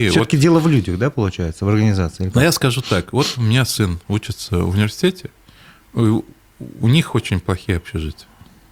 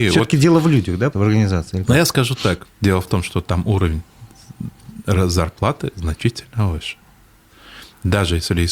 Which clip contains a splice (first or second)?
second